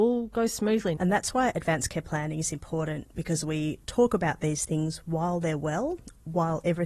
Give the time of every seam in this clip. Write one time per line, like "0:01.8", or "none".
0:01.0